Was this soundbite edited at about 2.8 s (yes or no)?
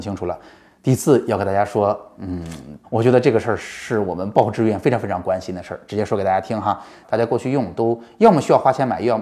yes